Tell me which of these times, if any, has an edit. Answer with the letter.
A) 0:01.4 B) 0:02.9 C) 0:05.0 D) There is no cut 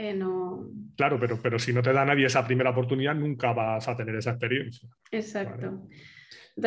C